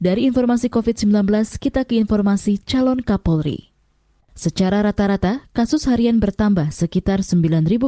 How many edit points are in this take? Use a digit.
1